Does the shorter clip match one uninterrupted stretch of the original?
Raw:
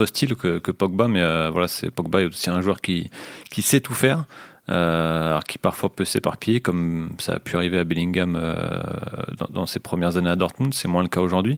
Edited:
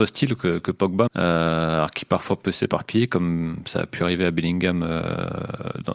no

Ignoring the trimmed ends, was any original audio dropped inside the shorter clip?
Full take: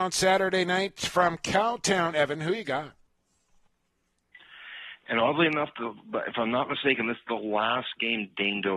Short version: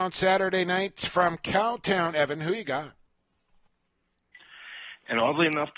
no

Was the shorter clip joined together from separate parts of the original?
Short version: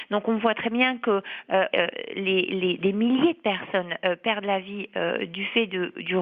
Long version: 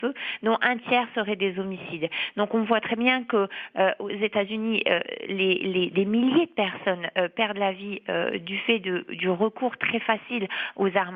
yes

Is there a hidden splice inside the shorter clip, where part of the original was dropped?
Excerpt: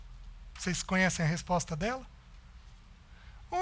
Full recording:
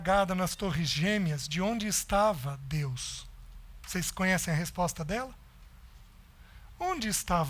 no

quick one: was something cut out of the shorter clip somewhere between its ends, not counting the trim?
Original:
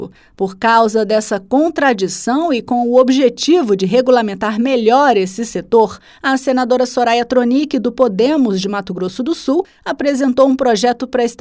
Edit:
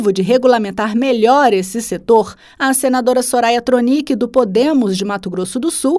no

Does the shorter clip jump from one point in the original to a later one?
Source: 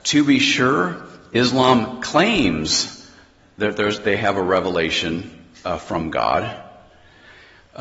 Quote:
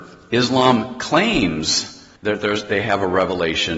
yes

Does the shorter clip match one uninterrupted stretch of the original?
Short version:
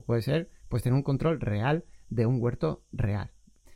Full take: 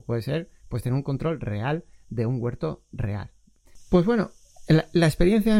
yes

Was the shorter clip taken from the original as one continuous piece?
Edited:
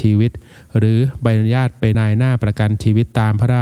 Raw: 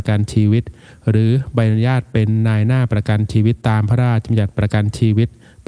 no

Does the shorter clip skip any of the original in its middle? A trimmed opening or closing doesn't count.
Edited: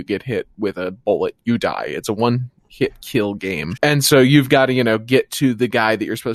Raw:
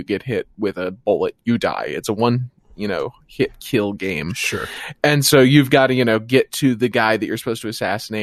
yes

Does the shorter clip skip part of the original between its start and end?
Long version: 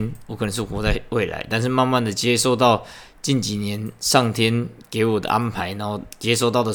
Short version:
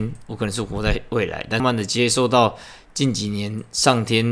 yes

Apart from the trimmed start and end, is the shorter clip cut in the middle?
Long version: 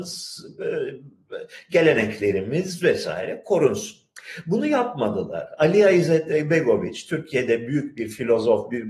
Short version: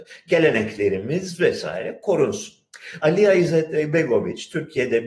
yes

